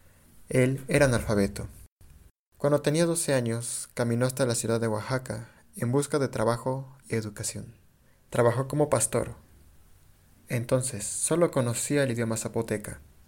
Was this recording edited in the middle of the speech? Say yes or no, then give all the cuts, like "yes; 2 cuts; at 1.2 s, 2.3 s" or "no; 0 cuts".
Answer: yes; 1 cut; at 8.3 s